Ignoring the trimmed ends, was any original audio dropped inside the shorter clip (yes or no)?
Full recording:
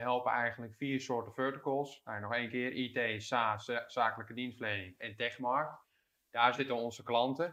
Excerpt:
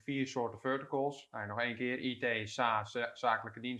no